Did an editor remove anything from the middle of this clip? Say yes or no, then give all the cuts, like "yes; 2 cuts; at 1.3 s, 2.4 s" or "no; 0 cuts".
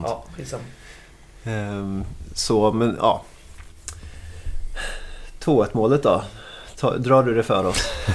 no; 0 cuts